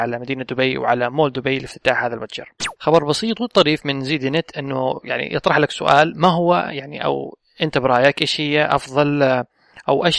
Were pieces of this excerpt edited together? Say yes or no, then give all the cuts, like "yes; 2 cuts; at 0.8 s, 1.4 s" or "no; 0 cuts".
yes; 1 cut; at 2.8 s